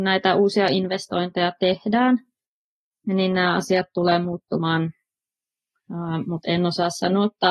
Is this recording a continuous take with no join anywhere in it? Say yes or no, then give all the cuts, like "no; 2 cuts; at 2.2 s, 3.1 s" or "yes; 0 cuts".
yes; 0 cuts